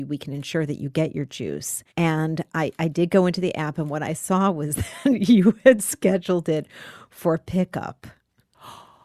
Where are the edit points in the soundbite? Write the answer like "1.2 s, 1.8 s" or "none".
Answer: 1.9 s